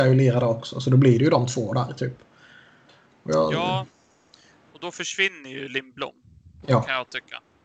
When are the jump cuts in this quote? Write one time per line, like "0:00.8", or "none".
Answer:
none